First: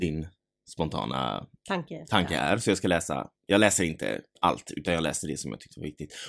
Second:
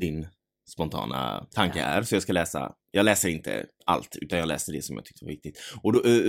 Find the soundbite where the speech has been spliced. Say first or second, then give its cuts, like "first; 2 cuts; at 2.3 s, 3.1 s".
second; 1 cut; at 1.5 s